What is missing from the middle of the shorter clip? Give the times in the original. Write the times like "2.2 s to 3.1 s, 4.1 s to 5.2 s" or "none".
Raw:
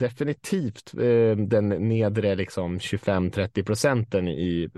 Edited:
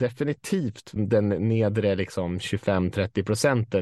1.0 s to 1.4 s